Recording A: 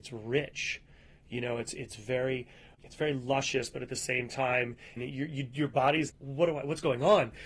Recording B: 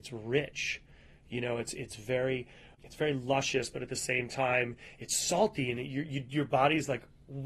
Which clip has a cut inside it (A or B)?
A